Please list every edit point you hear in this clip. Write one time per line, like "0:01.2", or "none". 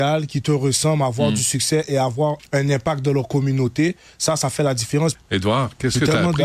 0:02.4
0:05.1